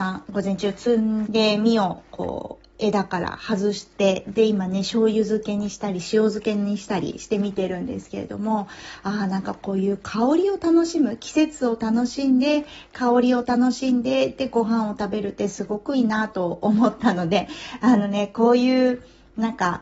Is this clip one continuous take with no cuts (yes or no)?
no